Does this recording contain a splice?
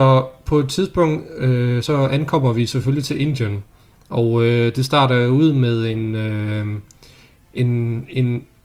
no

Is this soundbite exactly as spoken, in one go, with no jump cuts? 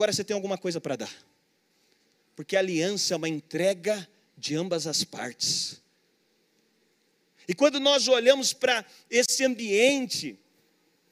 yes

